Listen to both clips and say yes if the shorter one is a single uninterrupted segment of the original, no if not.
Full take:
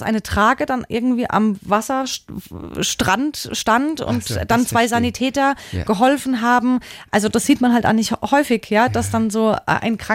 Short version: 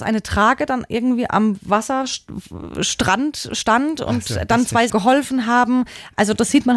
no